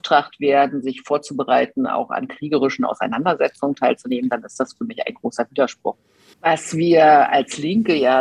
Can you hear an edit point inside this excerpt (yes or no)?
yes